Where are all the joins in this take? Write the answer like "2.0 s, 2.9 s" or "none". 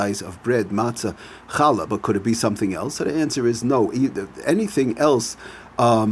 none